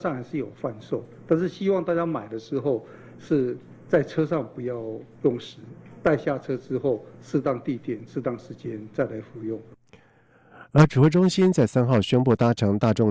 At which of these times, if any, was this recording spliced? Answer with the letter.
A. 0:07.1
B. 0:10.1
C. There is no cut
C